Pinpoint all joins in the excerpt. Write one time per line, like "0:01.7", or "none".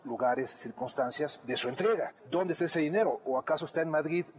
none

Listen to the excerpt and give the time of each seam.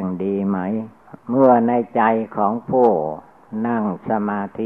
0:01.2

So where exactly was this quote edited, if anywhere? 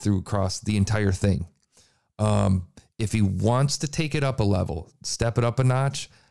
none

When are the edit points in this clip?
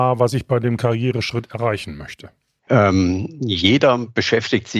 0:02.7

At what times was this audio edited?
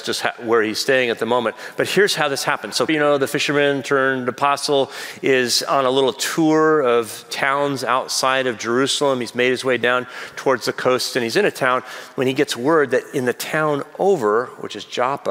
0:02.9

